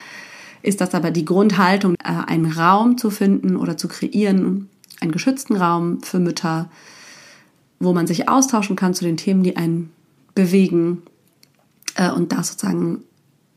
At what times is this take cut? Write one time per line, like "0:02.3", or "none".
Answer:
0:02.0